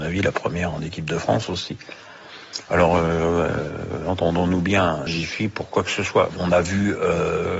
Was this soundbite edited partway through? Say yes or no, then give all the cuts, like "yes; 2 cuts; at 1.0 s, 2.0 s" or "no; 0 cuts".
yes; 2 cuts; at 5.1 s, 6.3 s